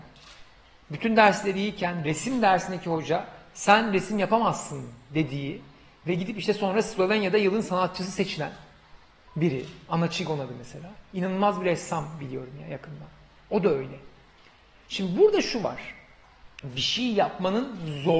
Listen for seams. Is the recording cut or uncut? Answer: uncut